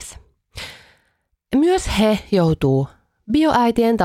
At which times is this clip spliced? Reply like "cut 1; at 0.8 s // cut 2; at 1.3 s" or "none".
none